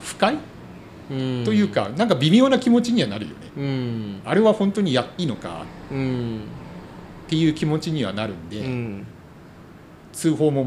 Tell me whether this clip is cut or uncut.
cut